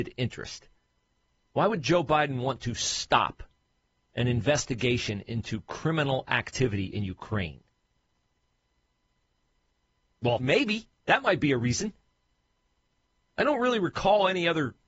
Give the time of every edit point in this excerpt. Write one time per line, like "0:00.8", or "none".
0:10.4